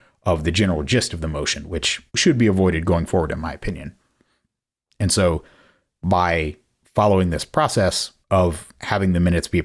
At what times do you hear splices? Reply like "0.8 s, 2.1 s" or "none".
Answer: 2.1 s, 4.9 s, 8.2 s